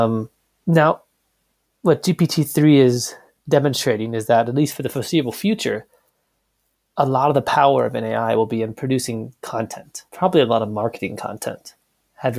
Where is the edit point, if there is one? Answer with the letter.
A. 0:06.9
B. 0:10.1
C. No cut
B